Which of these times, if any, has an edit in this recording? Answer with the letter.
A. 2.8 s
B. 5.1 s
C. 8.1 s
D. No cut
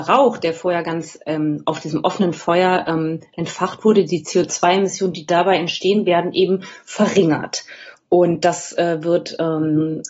D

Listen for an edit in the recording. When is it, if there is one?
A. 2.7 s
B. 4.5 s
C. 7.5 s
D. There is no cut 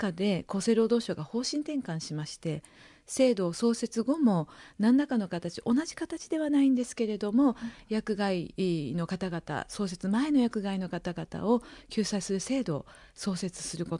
D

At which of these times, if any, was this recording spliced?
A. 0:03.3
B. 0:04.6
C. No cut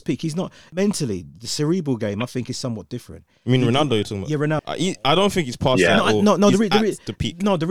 B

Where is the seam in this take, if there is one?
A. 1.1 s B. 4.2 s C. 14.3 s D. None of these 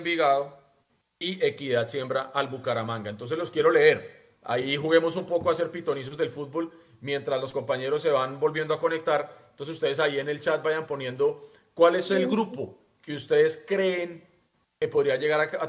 D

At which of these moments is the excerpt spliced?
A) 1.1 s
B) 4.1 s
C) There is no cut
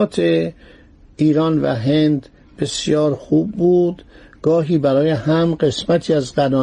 C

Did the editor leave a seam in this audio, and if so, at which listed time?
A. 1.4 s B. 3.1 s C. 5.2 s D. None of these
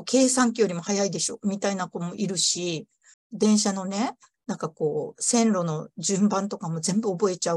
B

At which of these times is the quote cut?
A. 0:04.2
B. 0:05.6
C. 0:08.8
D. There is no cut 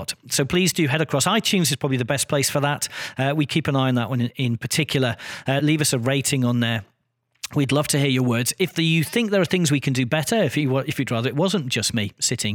B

